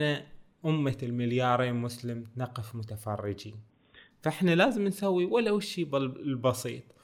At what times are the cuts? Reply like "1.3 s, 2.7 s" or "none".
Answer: none